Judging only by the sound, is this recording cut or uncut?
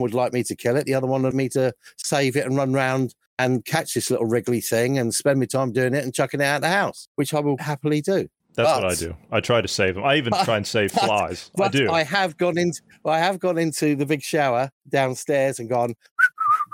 cut